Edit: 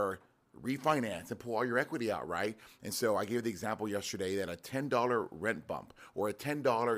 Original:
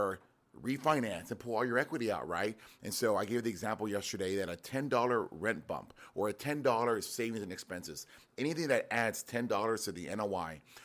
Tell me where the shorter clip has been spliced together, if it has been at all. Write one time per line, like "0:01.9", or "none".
none